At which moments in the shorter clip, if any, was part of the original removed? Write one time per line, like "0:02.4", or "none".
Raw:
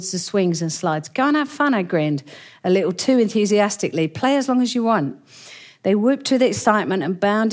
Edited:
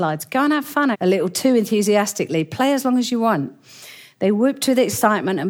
0:00.9